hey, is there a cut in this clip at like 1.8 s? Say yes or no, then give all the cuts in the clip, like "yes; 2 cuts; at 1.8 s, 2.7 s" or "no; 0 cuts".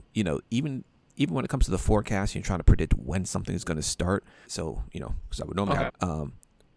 no; 2 cuts; at 4.4 s, 5.9 s